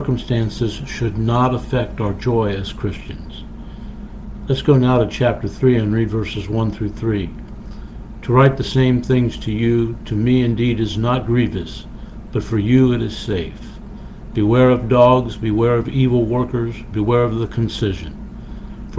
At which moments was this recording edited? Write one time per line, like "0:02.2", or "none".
0:08.2

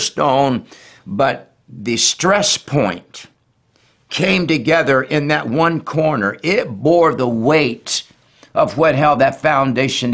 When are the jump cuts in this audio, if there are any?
0:01.0

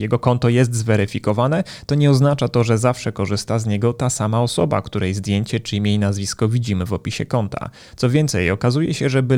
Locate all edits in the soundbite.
none

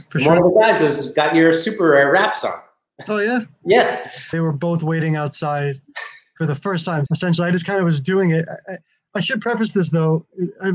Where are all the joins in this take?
0:04.3
0:07.1

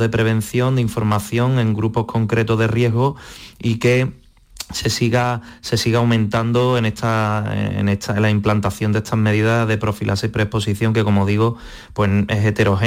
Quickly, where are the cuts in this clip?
none

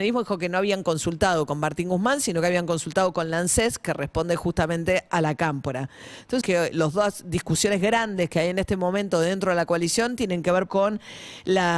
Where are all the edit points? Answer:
0:06.4
0:10.7

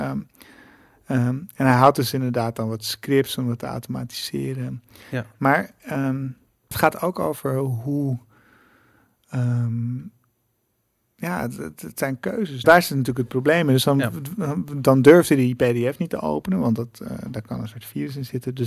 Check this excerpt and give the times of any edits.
0:06.7
0:12.6

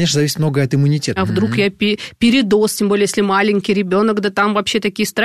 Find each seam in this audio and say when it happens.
0:01.2

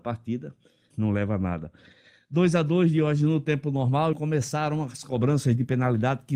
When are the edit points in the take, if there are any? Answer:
0:00.9
0:04.1

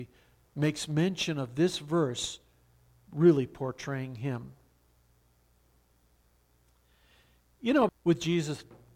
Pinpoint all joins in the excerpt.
0:07.9

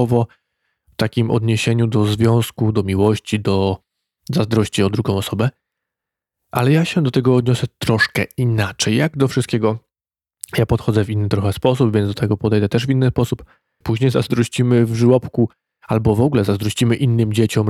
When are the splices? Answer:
0:13.8

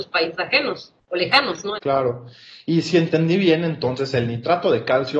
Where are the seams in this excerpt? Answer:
0:01.8

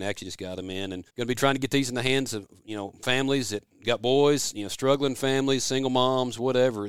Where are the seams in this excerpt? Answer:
0:01.1

